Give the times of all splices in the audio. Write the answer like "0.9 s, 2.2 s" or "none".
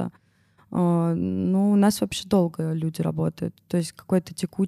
none

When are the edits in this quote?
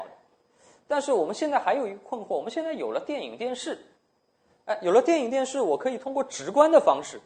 none

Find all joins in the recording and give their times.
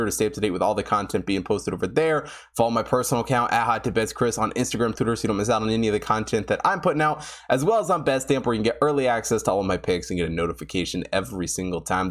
5.0 s

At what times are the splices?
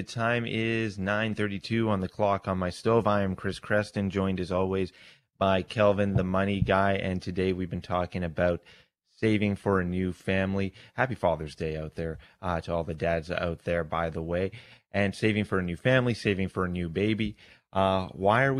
none

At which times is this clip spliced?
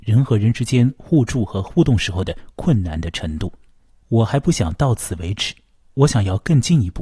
3.9 s

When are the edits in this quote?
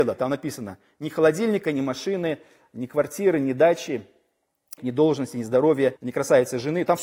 4.8 s, 6.0 s

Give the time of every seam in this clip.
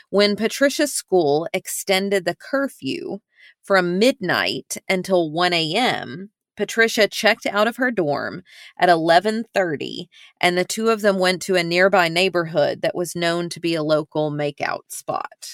none

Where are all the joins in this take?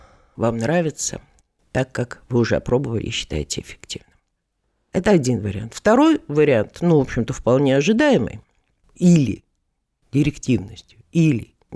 8.8 s

